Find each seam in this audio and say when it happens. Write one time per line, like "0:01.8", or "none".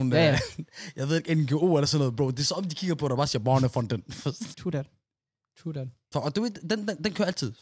0:04.5
0:06.1

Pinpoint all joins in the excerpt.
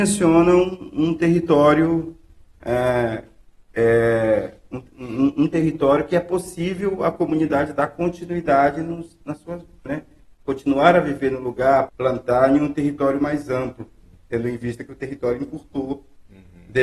0:09.9
0:11.9

